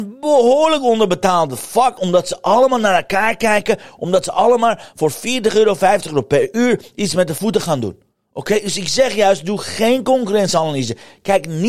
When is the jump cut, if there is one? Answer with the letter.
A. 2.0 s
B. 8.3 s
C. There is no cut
A